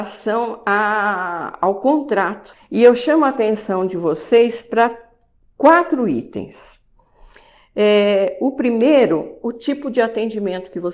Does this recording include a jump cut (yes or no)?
yes